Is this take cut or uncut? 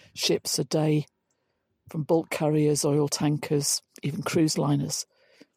uncut